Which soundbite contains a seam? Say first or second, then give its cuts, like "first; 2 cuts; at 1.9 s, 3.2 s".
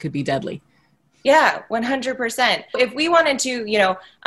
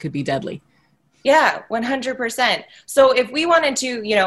first; 1 cut; at 2.7 s